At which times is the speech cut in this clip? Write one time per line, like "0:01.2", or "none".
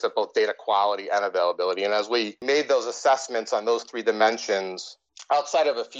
none